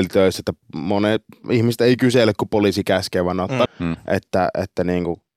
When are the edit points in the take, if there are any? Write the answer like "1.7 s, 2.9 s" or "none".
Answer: 1.4 s, 3.7 s